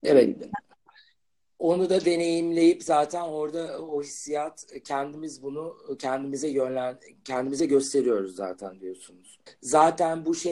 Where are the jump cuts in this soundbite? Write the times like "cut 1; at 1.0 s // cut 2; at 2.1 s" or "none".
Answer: cut 1; at 9.5 s